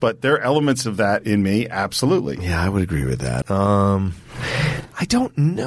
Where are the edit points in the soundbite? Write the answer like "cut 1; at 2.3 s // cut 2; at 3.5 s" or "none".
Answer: cut 1; at 3.4 s

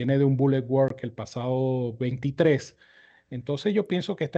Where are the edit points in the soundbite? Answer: none

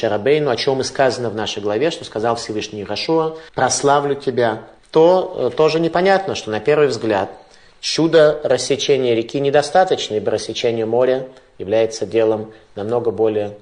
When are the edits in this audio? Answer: cut 1; at 3.5 s // cut 2; at 4.8 s

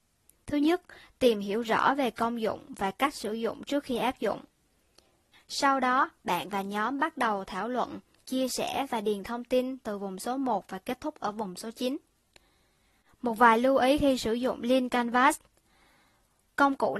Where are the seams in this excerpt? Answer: cut 1; at 5.3 s

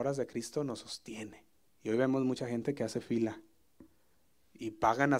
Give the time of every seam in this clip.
cut 1; at 1.7 s

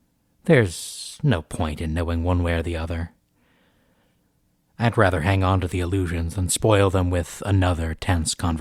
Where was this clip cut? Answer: none

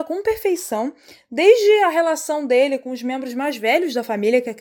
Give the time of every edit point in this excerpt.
none

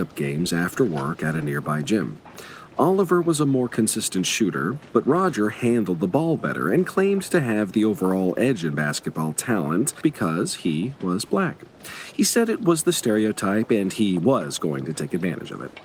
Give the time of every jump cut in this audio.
none

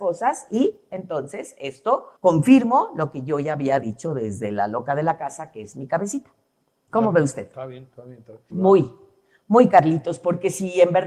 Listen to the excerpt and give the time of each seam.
cut 1; at 2.2 s // cut 2; at 8.5 s

